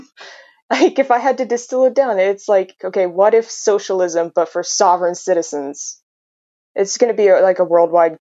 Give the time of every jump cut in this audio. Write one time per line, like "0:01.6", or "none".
none